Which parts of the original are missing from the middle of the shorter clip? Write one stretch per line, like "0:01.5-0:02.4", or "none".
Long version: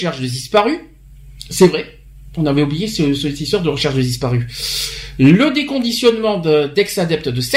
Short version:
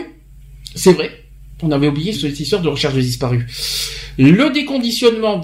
0:02.9-0:03.1